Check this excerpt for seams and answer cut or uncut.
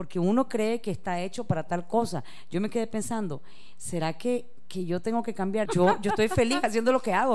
cut